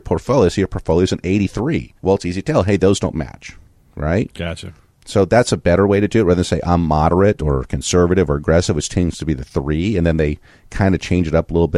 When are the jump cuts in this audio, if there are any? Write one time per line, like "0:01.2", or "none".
0:02.0